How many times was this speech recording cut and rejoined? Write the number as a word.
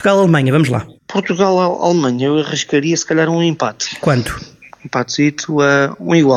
one